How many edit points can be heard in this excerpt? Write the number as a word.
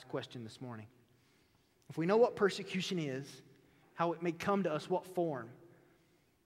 one